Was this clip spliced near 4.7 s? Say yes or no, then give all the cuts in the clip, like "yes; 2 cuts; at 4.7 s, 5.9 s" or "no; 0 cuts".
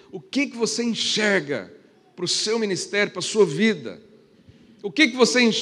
no; 0 cuts